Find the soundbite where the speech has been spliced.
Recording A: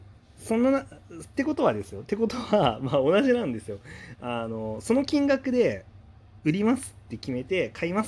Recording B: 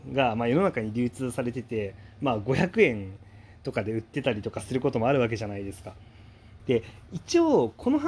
B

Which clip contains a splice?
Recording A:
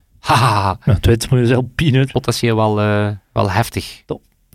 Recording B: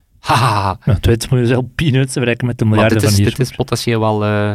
A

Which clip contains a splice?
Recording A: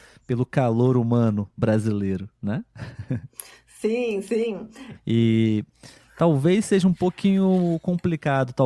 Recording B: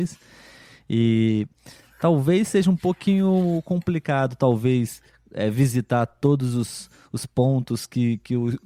A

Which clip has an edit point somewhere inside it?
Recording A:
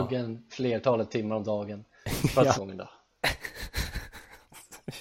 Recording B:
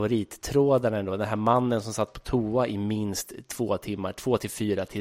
A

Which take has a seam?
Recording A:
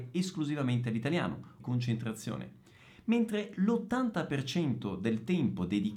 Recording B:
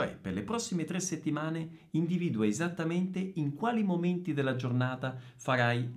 A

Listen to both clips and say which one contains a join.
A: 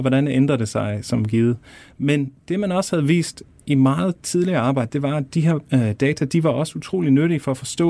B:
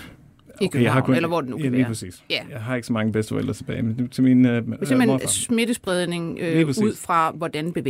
A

